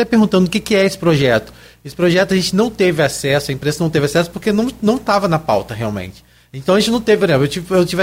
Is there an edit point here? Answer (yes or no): no